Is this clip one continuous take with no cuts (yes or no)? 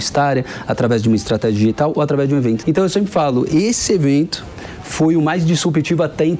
no